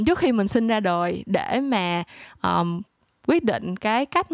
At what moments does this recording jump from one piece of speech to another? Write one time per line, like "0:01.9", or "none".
none